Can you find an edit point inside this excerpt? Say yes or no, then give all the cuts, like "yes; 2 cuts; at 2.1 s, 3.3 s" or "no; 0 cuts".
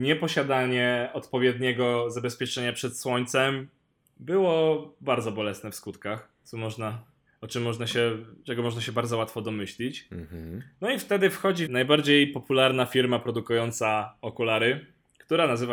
yes; 1 cut; at 11.7 s